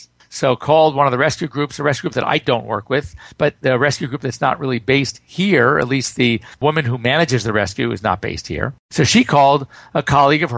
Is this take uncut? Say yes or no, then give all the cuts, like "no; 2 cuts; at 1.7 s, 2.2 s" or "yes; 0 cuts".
yes; 0 cuts